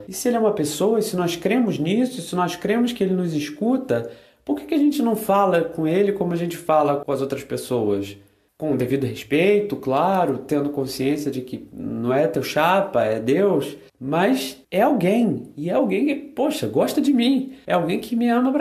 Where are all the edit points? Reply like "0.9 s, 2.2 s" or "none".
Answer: none